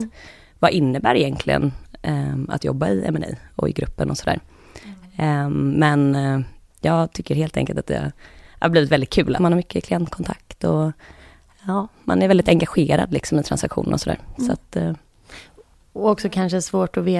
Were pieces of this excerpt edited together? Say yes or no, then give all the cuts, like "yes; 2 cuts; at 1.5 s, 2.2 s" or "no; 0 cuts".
yes; 1 cut; at 9.4 s